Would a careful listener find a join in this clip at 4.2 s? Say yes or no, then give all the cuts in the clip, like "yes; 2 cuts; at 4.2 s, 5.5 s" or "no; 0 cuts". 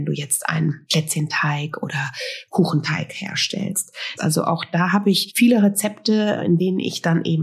yes; 1 cut; at 4.2 s